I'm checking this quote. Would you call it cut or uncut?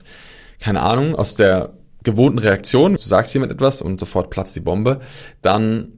cut